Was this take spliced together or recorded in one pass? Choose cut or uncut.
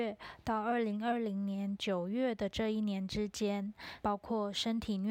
cut